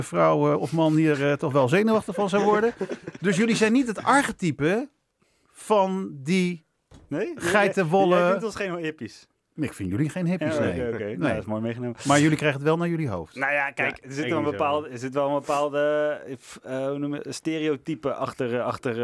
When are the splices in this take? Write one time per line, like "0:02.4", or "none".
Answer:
none